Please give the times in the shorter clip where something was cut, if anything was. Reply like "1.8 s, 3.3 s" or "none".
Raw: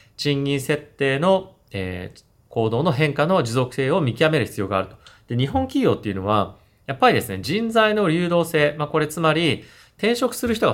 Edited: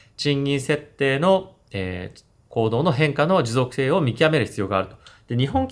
none